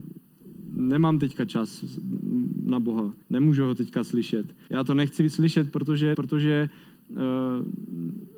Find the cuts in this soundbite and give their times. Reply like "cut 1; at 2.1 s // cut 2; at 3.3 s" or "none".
cut 1; at 3.2 s // cut 2; at 4.7 s // cut 3; at 6.1 s